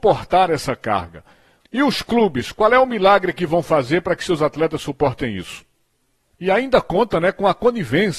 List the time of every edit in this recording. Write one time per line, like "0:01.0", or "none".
0:01.6
0:06.3